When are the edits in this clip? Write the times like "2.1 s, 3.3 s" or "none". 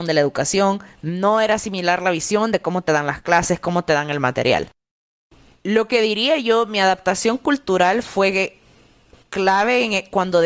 none